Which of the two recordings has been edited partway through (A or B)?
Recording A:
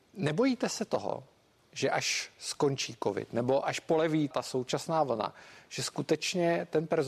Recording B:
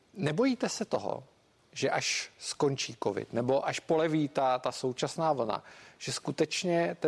A